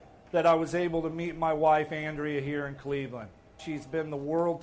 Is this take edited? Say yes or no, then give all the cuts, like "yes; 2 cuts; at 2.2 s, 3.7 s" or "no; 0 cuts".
yes; 1 cut; at 3.6 s